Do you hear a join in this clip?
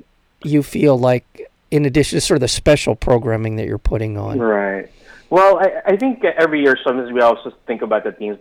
no; 0 cuts

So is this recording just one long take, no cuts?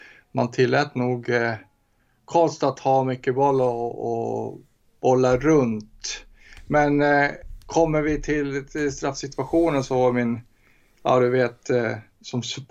yes; 0 cuts

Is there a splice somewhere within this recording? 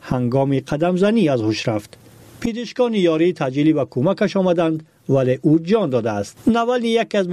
no; 0 cuts

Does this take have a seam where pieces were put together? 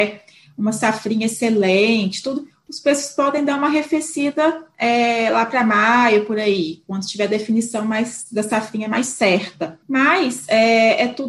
yes; 1 cut; at 9.8 s

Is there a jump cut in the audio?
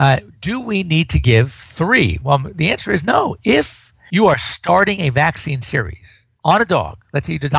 no; 0 cuts

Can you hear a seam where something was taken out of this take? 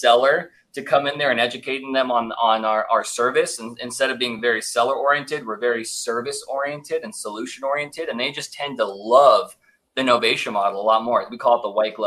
no; 0 cuts

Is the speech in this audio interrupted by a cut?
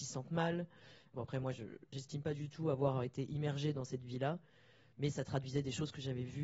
yes; 1 cut; at 1.1 s

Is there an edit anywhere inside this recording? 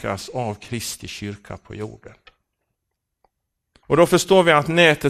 yes; 1 cut; at 3.8 s

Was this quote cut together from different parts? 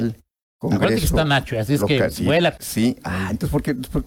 yes; 1 cut; at 2.6 s

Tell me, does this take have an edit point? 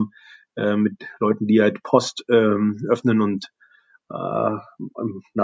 no; 0 cuts

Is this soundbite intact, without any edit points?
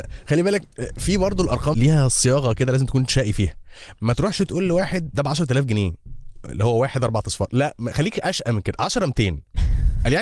no; 1 cut; at 1.7 s

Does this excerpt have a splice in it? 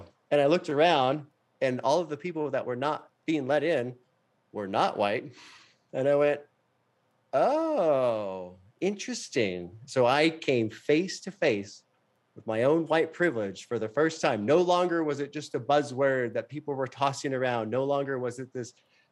no; 0 cuts

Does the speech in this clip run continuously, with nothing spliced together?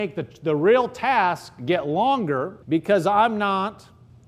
no; 1 cut; at 2.6 s

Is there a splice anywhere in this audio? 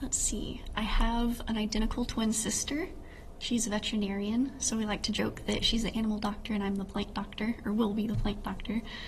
no; 0 cuts

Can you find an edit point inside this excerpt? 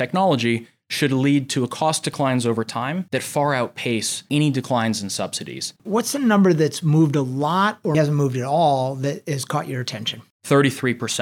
yes; 2 cuts; at 5.8 s, 7.9 s

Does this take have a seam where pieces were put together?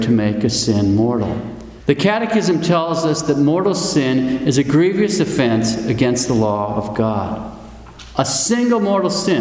yes; 1 cut; at 1.8 s

